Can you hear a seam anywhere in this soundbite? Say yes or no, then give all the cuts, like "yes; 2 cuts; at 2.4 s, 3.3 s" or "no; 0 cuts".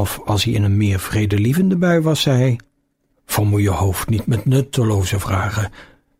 yes; 1 cut; at 3.1 s